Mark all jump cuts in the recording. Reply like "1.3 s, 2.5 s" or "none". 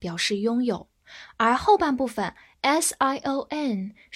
none